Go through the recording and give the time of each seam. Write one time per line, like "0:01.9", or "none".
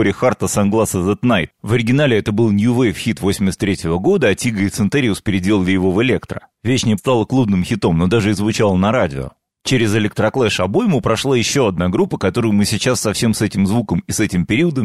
0:07.0